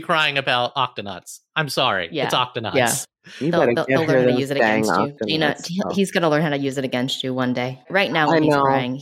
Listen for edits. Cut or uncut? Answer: uncut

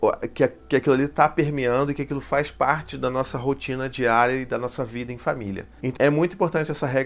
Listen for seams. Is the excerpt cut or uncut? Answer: cut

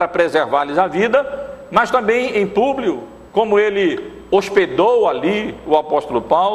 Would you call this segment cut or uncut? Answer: cut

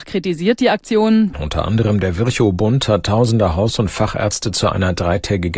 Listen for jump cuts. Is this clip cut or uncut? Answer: cut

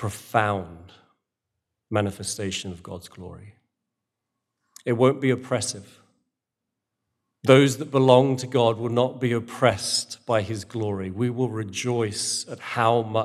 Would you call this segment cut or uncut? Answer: uncut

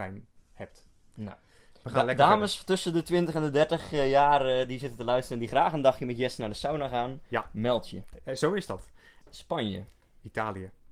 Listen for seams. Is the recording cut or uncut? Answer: cut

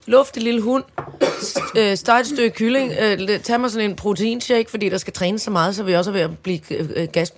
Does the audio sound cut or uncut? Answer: uncut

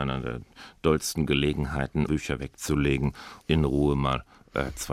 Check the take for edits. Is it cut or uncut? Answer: cut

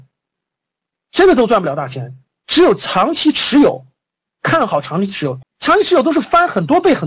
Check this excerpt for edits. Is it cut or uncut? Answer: cut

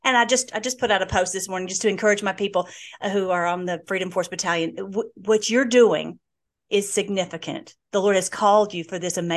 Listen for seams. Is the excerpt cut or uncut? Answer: uncut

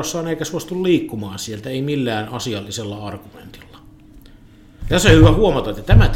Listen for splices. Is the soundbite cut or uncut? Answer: uncut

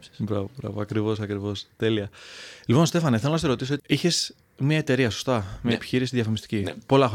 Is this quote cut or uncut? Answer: cut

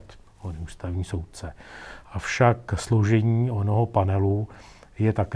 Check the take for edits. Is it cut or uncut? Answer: uncut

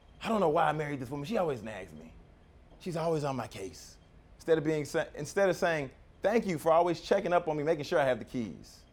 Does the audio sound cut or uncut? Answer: uncut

